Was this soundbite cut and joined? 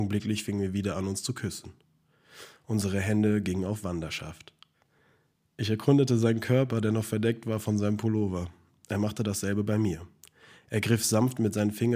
no; 0 cuts

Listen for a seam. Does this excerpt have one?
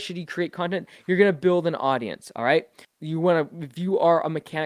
yes; 1 cut; at 2.8 s

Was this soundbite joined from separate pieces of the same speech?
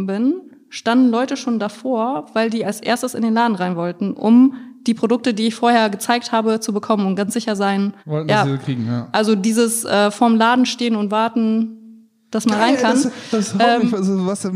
yes; 1 cut; at 8.0 s

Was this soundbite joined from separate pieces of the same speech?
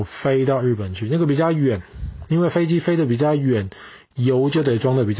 no; 0 cuts

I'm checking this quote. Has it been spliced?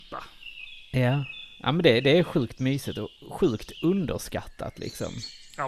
no; 0 cuts

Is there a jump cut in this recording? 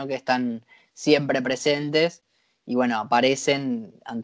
no; 0 cuts

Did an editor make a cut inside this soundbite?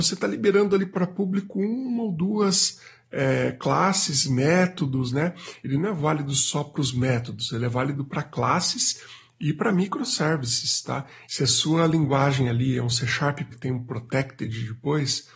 yes; 3 cuts; at 5.6 s, 11.3 s, 13.5 s

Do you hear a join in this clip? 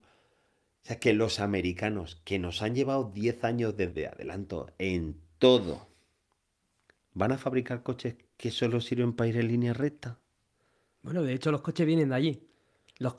yes; 1 cut; at 3.9 s

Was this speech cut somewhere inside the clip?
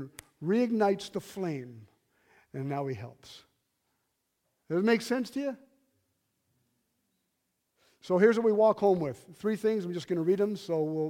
no; 0 cuts

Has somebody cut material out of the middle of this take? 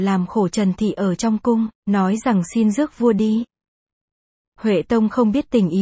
yes; 1 cut; at 1.7 s

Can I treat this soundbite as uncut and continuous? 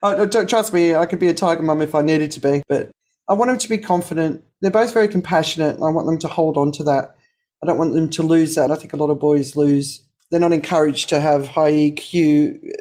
yes; 0 cuts

